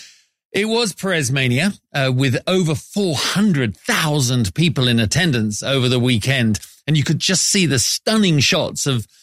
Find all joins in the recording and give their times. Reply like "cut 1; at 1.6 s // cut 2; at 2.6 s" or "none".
none